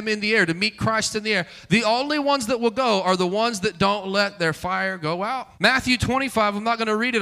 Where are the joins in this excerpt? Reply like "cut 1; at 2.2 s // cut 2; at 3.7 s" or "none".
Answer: cut 1; at 5.5 s